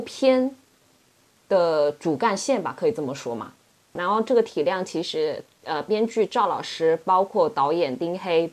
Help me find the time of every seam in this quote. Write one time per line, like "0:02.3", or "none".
0:04.0